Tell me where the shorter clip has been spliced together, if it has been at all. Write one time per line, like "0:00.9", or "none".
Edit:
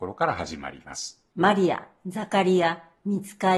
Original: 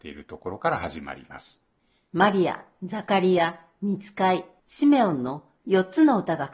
0:01.3

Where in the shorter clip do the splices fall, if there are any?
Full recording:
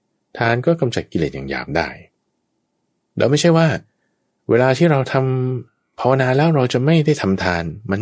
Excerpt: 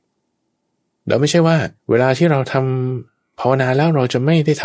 0:01.8

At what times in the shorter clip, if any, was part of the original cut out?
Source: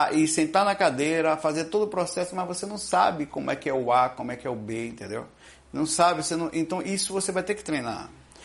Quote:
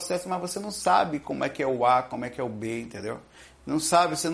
none

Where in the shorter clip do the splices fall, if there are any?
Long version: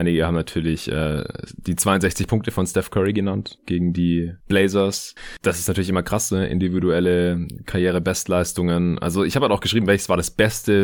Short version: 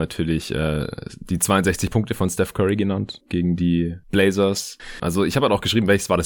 0:05.0

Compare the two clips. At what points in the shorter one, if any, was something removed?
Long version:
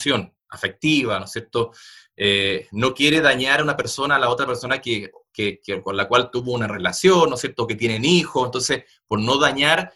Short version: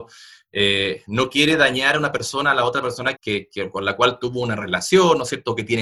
0:03.2

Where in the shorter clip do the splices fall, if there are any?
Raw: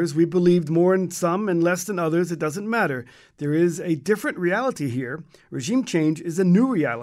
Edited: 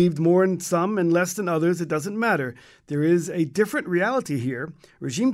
none

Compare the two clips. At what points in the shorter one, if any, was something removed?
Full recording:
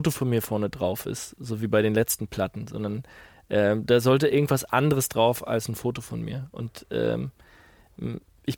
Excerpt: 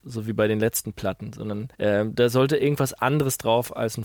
0:01.7

